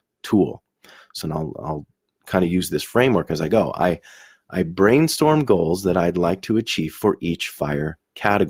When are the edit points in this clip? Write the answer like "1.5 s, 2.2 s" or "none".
1.2 s